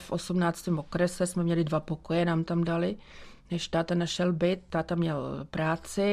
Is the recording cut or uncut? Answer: uncut